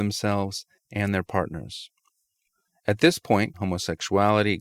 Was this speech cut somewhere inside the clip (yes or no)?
yes